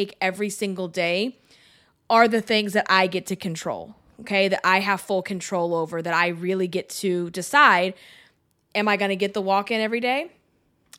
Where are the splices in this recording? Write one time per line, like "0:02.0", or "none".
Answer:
none